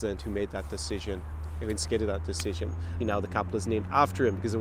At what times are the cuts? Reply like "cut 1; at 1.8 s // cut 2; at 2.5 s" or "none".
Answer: cut 1; at 3.0 s